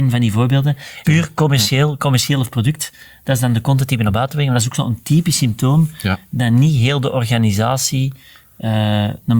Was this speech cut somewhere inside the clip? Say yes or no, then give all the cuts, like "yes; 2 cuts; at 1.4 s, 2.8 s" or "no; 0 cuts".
yes; 1 cut; at 1.0 s